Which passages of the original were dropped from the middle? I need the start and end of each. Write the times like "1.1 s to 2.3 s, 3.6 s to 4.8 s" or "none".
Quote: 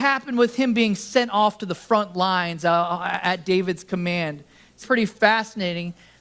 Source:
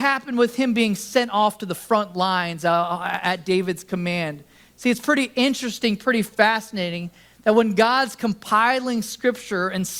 4.8 s to 6.0 s